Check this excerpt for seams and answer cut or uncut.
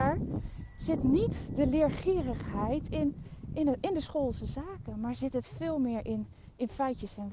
uncut